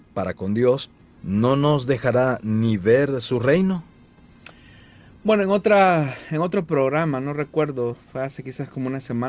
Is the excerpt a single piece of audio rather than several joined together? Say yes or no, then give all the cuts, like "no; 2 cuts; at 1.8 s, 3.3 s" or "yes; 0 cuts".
no; 1 cut; at 1.2 s